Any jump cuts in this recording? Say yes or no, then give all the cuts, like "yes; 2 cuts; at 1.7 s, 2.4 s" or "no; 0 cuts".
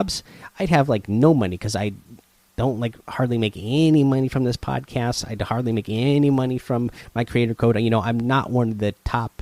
no; 0 cuts